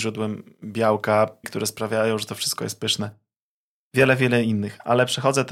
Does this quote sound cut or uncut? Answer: cut